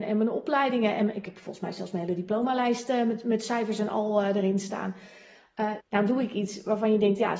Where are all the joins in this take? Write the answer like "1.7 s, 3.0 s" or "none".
5.8 s